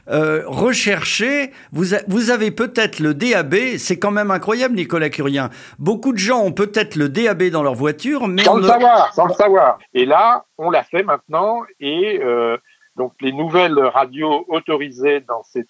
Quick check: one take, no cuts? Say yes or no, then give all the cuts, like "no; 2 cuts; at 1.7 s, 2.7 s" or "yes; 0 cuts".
no; 1 cut; at 9.8 s